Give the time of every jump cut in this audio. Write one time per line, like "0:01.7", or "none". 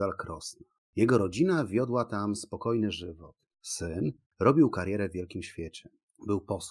0:04.3

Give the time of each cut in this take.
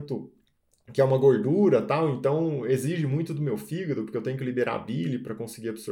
none

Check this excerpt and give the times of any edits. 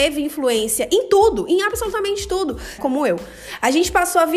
0:02.8

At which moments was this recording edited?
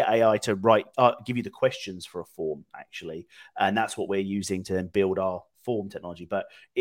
none

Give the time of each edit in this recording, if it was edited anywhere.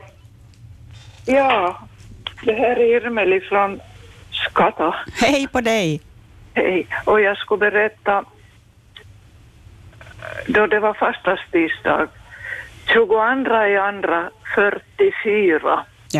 none

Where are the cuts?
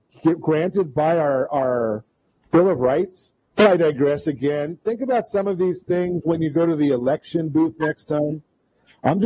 0:03.6

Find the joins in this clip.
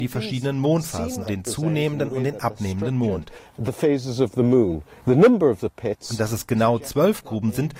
0:01.2

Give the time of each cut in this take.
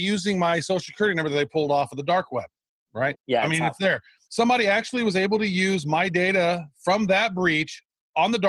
0:03.1

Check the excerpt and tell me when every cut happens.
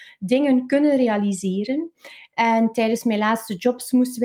0:02.3

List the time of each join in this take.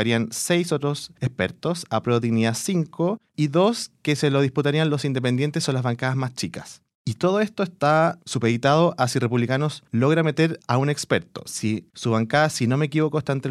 0:03.3
0:11.9

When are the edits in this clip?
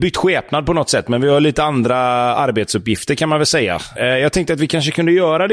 0:04.0

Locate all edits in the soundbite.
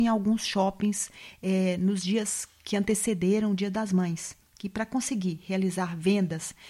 none

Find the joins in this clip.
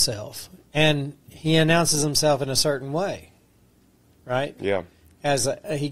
none

